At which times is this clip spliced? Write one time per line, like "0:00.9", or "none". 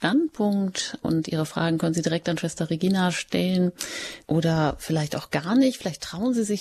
0:04.2